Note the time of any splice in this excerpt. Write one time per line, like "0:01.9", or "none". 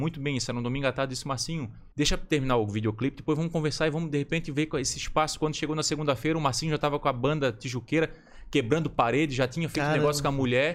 0:01.9